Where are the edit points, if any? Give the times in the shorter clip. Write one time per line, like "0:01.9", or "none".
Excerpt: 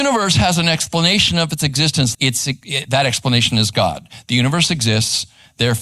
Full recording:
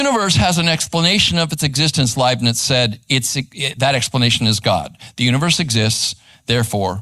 0:02.1